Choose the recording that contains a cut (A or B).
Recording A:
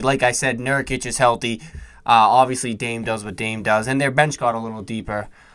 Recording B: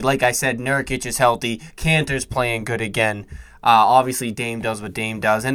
A